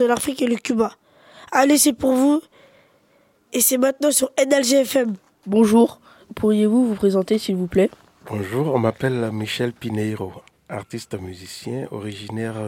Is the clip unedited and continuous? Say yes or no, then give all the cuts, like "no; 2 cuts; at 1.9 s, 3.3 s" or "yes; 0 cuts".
yes; 0 cuts